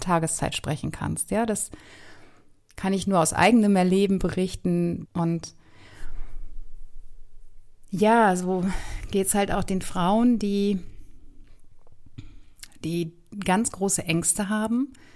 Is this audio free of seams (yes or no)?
no